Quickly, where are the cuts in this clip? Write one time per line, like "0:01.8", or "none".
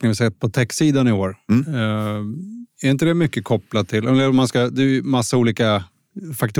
none

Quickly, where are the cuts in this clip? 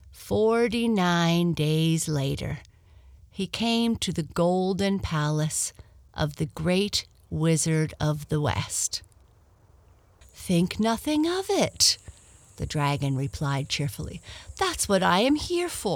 0:10.2

